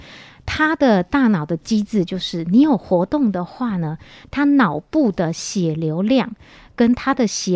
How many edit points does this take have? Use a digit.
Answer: 0